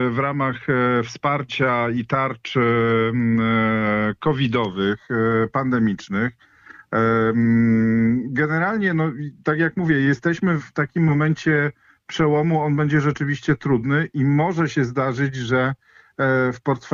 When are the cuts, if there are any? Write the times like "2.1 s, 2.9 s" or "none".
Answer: 10.6 s